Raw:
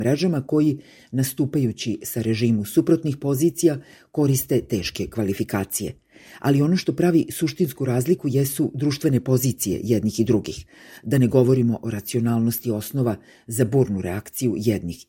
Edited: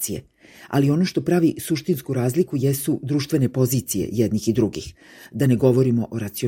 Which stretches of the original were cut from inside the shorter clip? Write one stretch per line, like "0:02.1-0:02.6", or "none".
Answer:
none